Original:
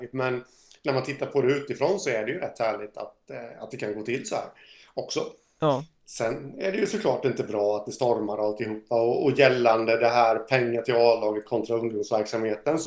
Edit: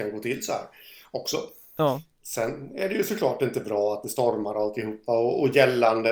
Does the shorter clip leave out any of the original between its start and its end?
no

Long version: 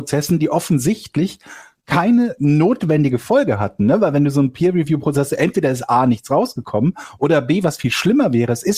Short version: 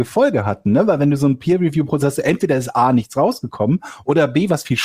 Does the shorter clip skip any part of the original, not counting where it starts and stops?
no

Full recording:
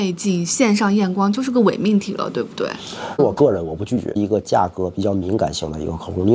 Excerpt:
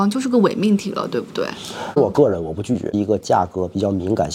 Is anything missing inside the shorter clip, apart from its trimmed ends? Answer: no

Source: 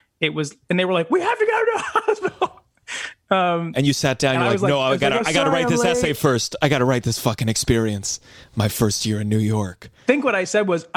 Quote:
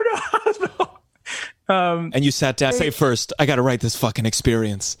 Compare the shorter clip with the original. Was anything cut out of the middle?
yes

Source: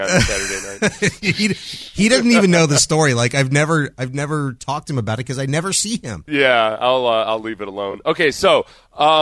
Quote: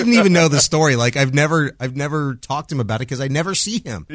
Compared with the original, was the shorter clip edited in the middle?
no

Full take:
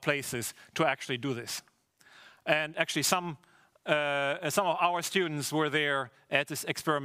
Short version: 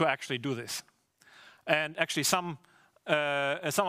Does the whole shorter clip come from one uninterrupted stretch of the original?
yes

